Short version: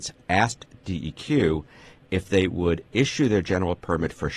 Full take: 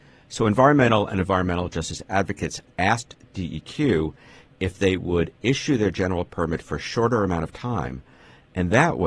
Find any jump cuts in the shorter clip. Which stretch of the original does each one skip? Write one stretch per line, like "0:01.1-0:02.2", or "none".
none